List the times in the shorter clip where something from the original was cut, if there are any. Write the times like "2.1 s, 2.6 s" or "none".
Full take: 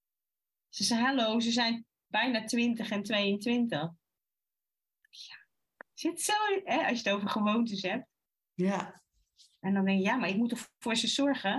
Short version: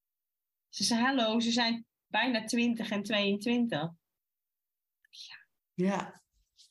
5.6 s